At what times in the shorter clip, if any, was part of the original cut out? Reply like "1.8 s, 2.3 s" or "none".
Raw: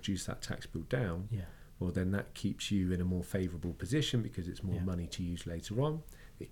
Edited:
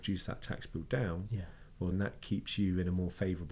1.9 s